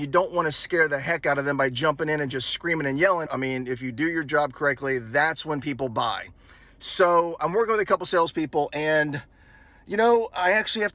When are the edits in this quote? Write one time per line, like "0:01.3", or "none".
0:03.3